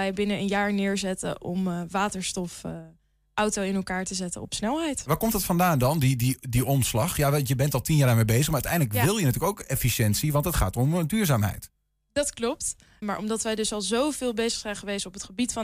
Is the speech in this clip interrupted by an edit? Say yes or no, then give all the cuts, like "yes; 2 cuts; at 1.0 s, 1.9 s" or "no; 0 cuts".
yes; 1 cut; at 13.0 s